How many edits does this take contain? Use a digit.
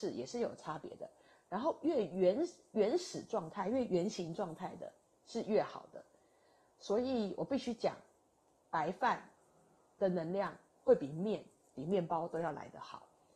0